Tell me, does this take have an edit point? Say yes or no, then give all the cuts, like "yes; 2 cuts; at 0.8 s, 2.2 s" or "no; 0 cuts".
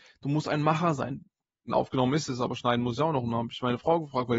yes; 1 cut; at 1.7 s